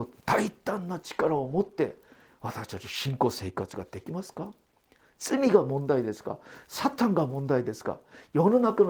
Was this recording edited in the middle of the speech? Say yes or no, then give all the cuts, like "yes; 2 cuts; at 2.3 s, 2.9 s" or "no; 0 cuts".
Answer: no; 0 cuts